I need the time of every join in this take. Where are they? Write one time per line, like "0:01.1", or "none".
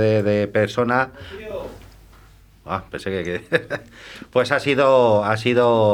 none